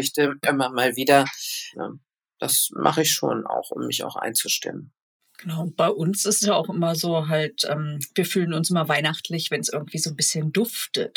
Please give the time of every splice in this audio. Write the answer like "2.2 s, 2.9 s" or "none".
1.7 s